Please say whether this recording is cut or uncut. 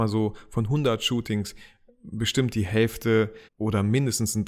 cut